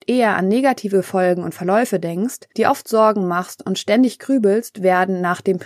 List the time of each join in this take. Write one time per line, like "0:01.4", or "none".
none